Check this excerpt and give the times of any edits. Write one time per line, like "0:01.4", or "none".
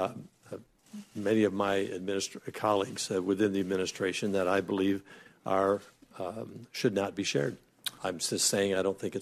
0:08.0